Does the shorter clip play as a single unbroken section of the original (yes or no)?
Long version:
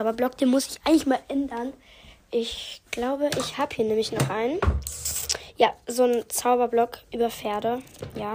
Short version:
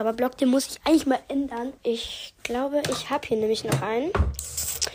no